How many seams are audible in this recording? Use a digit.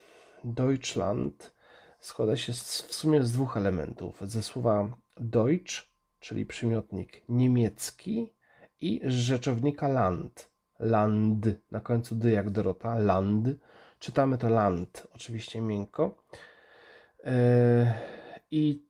0